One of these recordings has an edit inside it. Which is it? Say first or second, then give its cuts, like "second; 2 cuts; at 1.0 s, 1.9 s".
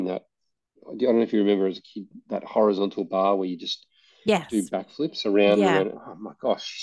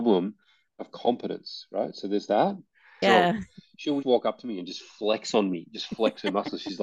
second; 2 cuts; at 3.0 s, 4.0 s